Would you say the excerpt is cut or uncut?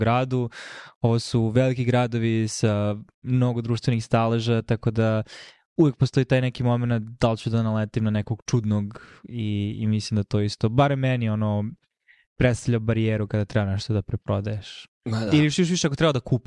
uncut